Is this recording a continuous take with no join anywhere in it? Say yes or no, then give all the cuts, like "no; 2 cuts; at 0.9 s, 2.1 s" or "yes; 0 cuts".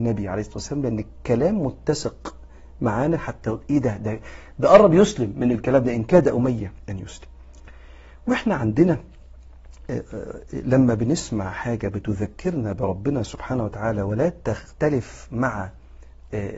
yes; 0 cuts